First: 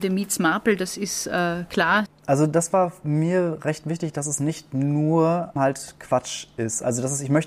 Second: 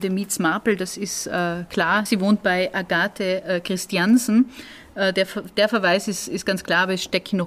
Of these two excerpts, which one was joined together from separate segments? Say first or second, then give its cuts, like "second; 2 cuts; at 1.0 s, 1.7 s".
first; 2 cuts; at 2.1 s, 5.6 s